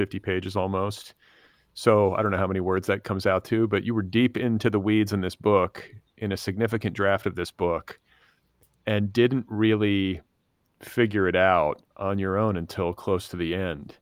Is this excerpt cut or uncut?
cut